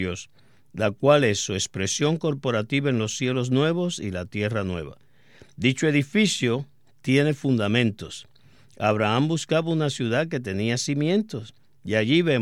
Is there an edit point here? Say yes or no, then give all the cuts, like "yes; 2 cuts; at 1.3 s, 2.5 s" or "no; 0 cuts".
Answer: no; 0 cuts